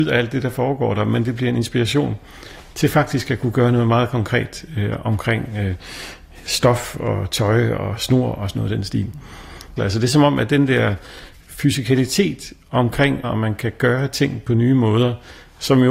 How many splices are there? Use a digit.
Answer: 2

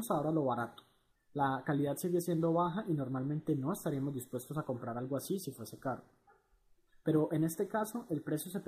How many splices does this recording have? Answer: 1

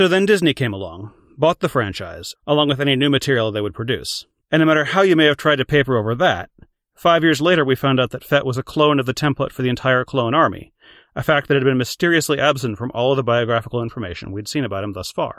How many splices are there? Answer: 2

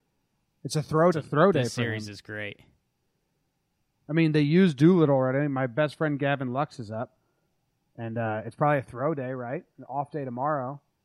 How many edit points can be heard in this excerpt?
1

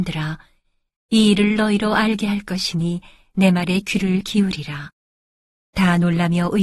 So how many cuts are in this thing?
1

